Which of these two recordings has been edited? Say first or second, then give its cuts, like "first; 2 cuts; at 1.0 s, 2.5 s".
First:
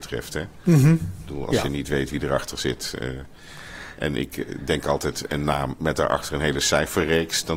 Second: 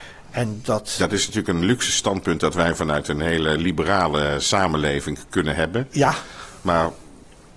first; 1 cut; at 5.3 s